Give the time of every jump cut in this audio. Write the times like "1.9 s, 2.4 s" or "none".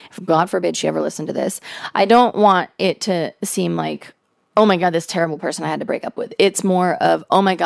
none

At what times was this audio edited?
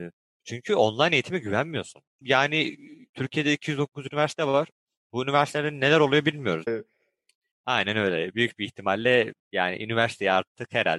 2.2 s, 6.7 s, 9.4 s

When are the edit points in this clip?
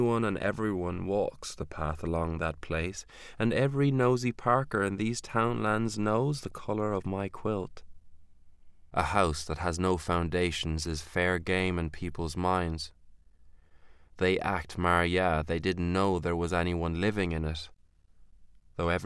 8.9 s

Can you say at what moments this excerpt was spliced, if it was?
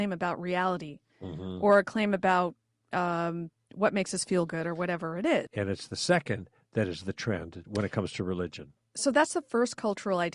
1.1 s, 5.5 s, 7.6 s

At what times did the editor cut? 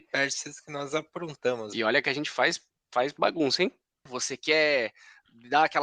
1.7 s, 4.1 s

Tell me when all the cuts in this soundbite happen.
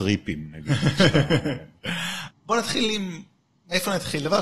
2.3 s

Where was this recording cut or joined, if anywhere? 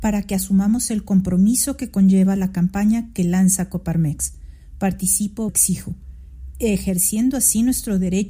5.5 s

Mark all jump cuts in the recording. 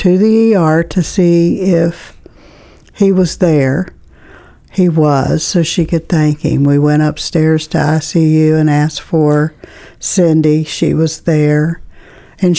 none

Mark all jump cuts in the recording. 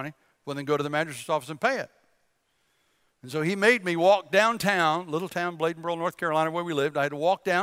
none

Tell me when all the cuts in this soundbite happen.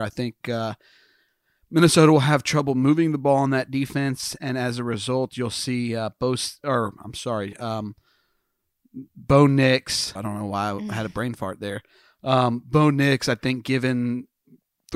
10.2 s

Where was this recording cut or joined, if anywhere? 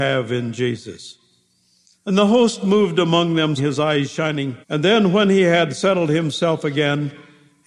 1.9 s, 3.6 s, 4.6 s

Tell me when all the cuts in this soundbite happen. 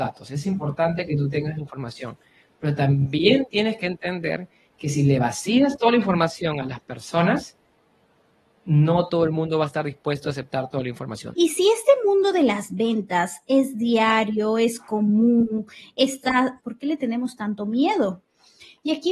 11.3 s, 16.6 s

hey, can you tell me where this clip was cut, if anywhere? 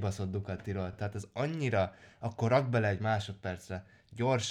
none

